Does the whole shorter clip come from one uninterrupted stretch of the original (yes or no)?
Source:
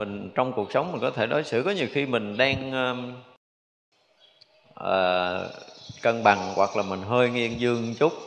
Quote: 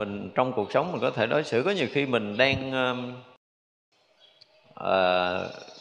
yes